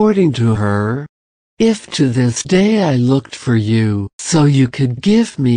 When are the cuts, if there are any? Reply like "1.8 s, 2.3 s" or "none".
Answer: 4.2 s